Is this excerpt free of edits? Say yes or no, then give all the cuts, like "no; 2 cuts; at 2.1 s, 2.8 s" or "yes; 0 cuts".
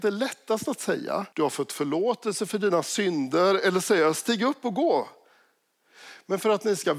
no; 1 cut; at 1.3 s